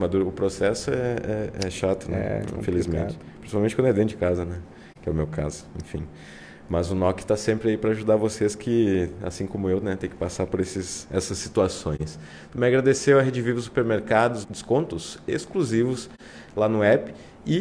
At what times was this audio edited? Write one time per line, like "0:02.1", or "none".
0:14.4